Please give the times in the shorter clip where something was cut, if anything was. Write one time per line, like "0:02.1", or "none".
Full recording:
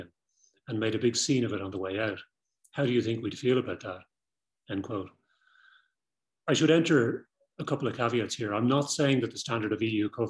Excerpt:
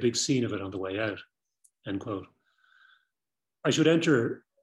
0:01.7